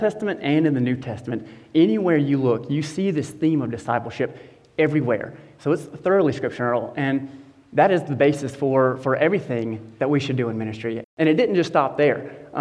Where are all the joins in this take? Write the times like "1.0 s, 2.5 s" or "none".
11.0 s